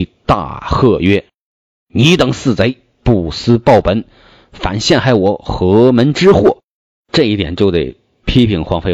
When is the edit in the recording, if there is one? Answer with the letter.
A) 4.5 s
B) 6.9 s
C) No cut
B